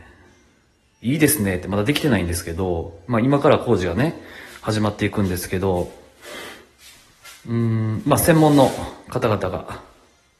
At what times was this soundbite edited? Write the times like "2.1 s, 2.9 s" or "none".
none